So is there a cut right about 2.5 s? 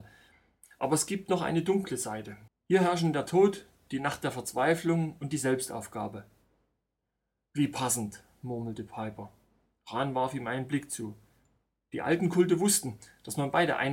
yes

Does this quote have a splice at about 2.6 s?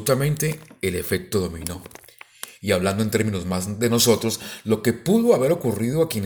no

